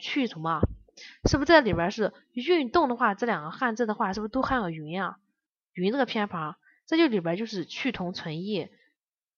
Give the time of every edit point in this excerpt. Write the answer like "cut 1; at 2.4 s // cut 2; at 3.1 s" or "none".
none